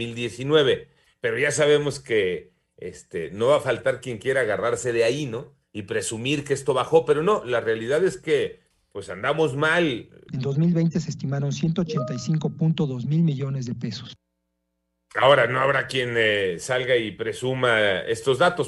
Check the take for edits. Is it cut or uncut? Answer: cut